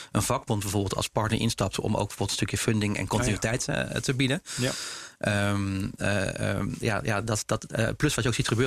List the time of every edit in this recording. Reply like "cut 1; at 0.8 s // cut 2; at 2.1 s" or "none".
cut 1; at 6.8 s